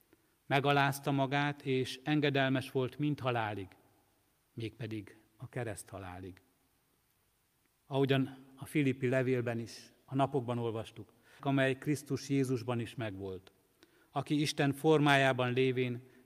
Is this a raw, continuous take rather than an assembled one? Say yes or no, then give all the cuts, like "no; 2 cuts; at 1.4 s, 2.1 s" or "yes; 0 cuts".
no; 2 cuts; at 7.7 s, 11.4 s